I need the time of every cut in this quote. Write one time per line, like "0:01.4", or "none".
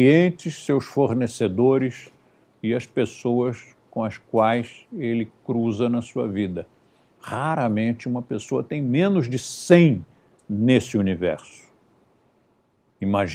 0:07.1